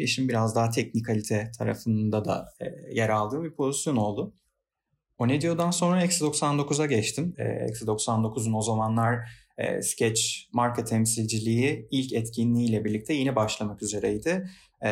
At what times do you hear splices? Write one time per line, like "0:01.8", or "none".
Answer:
0:07.3

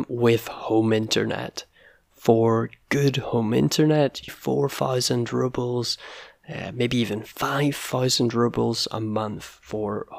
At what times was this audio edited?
0:04.3

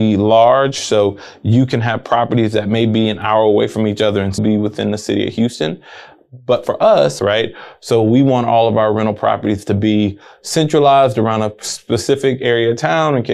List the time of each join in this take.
0:04.4
0:07.2

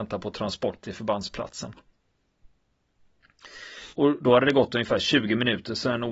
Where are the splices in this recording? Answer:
0:03.9

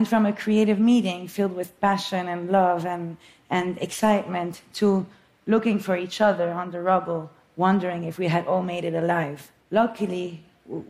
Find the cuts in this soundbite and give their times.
0:09.6

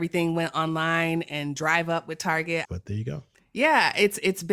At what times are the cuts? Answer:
0:02.6

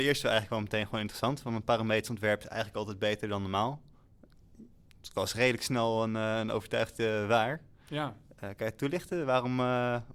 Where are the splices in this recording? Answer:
none

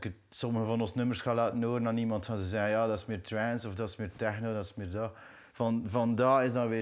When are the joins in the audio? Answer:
0:05.5

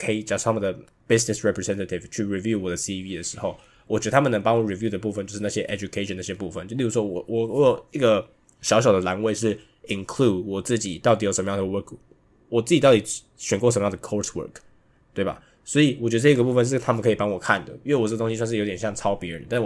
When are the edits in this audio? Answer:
none

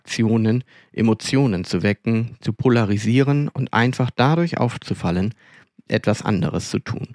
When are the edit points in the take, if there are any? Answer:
none

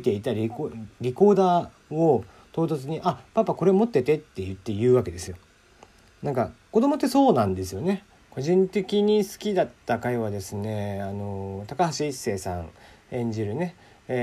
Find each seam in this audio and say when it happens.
0:08.2

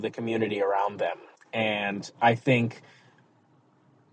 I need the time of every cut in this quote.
none

